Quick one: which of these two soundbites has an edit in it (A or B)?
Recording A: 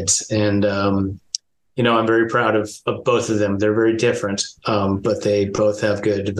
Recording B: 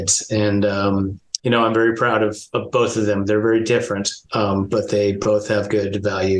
B